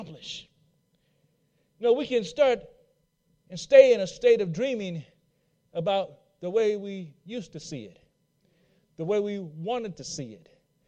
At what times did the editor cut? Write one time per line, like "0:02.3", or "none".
none